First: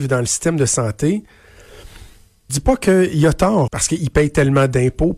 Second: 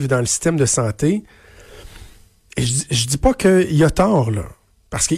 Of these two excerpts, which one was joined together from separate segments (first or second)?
first